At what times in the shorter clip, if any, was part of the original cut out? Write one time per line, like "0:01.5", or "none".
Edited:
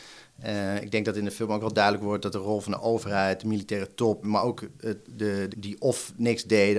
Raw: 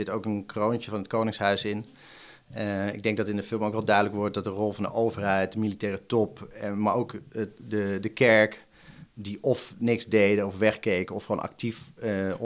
0:04.2
0:05.5